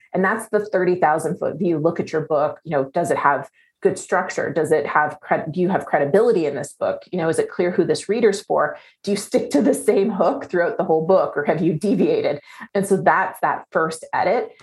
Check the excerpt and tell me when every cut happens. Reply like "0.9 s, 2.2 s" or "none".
none